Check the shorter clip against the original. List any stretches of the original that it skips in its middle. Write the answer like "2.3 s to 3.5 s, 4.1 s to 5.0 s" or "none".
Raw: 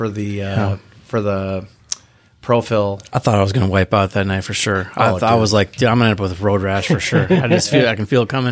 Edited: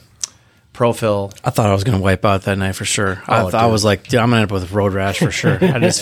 none